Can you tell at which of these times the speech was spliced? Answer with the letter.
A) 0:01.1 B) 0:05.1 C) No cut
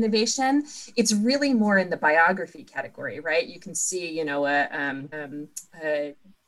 B